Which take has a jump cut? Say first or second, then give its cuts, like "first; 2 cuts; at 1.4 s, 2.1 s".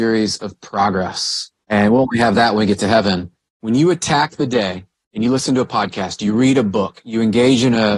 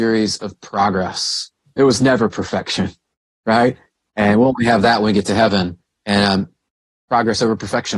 first; 2 cuts; at 1.6 s, 3.5 s